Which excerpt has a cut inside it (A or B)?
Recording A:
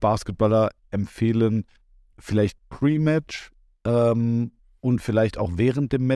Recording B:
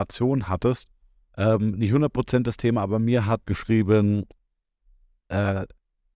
B